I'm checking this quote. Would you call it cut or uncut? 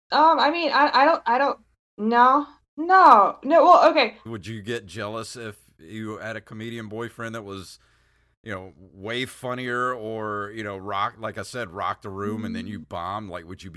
cut